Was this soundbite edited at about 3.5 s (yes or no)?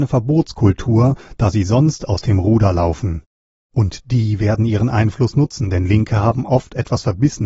yes